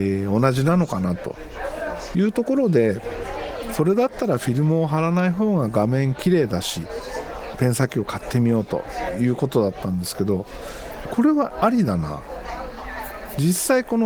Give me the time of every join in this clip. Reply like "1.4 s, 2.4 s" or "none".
7.5 s, 11.0 s